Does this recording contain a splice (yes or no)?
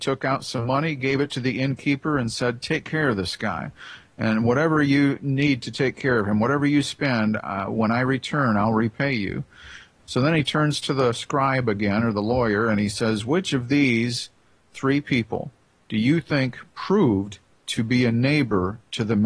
no